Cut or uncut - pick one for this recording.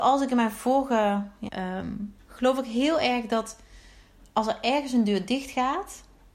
cut